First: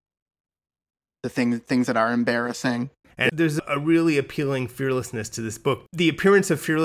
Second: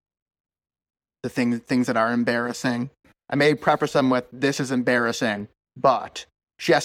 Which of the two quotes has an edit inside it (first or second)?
first